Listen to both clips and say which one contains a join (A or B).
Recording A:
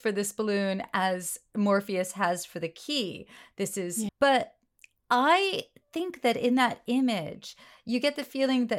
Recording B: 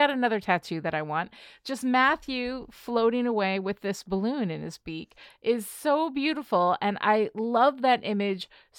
A